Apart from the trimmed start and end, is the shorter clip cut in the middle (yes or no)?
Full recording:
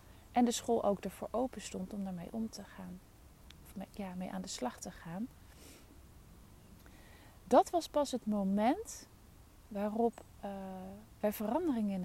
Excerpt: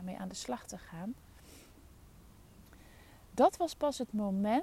no